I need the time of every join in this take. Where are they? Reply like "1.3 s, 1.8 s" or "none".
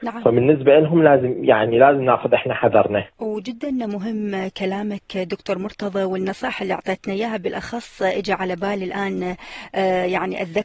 3.1 s

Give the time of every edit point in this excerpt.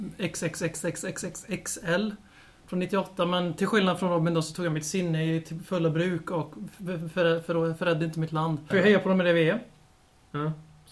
8.7 s

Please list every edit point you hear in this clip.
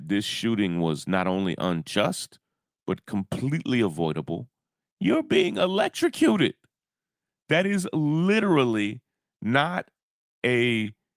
4.8 s

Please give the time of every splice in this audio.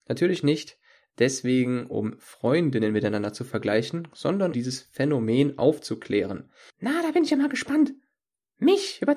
4.5 s, 6.7 s

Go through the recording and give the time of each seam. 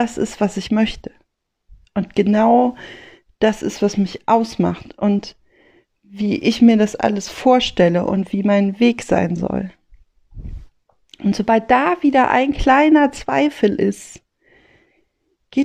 none

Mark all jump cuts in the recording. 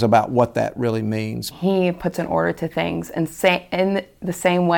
1.5 s

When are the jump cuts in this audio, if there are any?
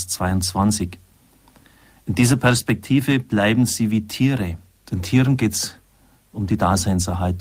4.8 s

